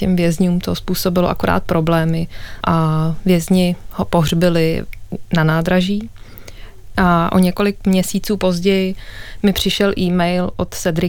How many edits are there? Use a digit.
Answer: 2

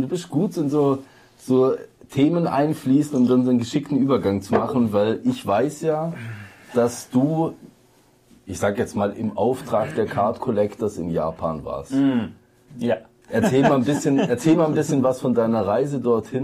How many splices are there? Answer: 0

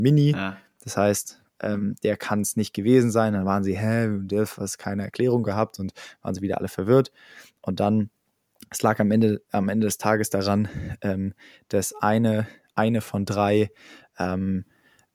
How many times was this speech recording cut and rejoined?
0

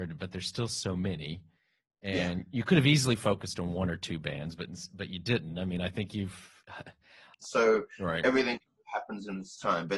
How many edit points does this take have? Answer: 1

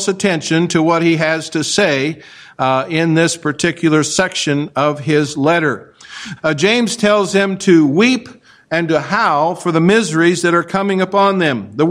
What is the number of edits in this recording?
1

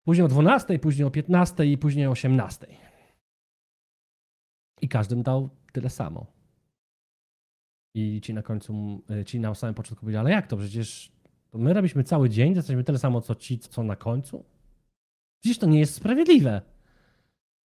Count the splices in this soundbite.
1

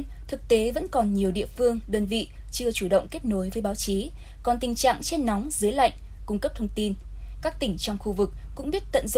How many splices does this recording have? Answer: 2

